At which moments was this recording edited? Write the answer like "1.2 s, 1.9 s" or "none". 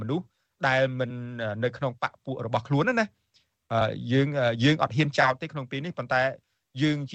none